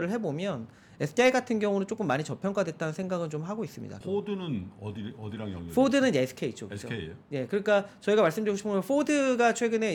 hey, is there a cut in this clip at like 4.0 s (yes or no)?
yes